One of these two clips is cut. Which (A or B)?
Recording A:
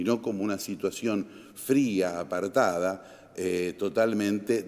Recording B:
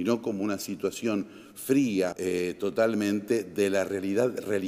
B